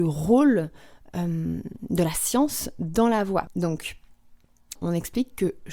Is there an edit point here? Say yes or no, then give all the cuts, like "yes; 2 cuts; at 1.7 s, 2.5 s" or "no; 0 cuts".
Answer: yes; 2 cuts; at 3.5 s, 4.8 s